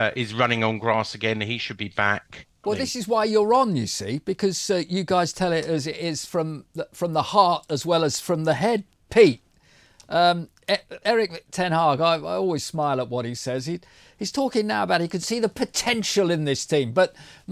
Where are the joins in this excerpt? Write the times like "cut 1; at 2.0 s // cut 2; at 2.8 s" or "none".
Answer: cut 1; at 2.6 s